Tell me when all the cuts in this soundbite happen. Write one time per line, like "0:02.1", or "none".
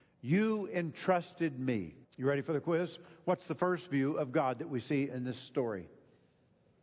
0:02.0

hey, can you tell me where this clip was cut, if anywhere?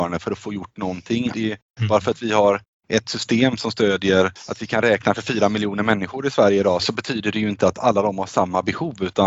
0:01.3

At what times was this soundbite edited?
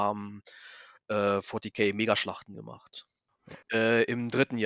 0:03.6

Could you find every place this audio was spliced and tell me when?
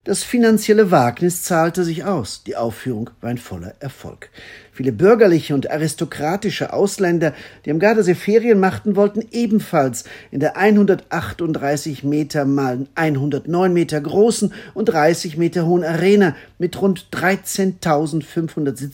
0:04.6

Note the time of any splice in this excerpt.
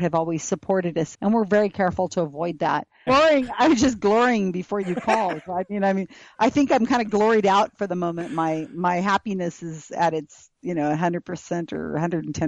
0:01.1
0:03.1
0:04.8

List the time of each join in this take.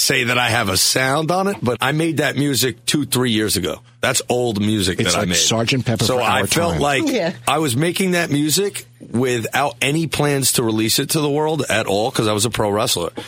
0:01.7

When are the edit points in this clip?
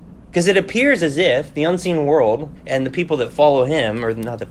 0:02.6

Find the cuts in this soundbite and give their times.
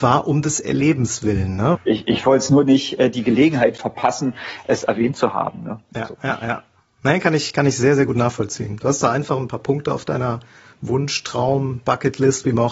0:01.7

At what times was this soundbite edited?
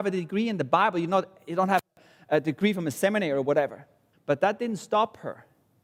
0:04.1

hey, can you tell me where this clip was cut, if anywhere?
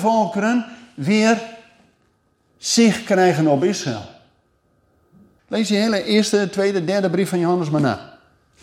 0:05.4

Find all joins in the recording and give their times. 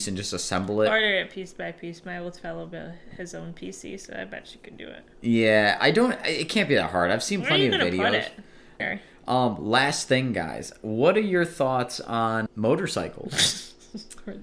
0:08.8
0:12.5

